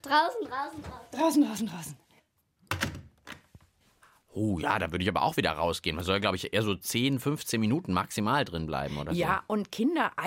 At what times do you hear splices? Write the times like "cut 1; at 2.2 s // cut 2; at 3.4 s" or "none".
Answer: none